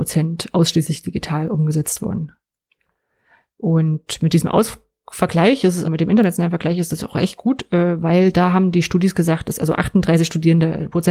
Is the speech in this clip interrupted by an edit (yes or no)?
yes